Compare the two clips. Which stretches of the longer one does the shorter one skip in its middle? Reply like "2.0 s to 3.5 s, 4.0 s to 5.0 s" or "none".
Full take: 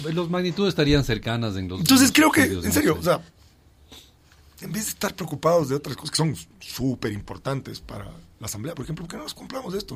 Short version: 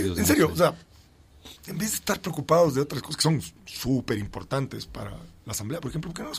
4.0 s to 4.5 s